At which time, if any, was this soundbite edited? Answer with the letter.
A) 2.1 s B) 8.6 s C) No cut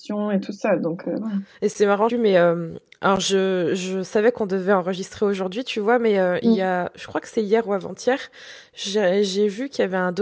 A